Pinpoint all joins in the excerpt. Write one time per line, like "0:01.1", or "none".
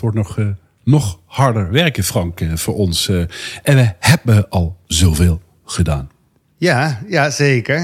none